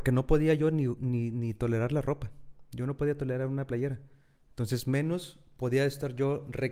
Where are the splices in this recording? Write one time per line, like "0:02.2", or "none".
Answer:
none